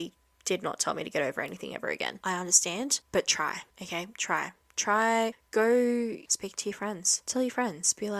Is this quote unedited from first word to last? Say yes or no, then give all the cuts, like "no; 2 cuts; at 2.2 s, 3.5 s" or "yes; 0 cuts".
no; 1 cut; at 2.2 s